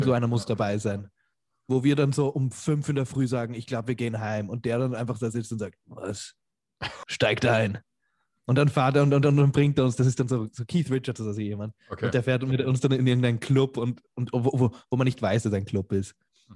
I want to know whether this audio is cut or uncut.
cut